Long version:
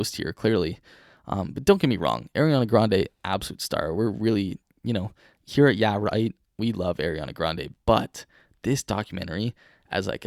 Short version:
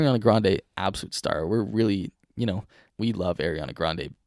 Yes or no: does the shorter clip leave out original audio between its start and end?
yes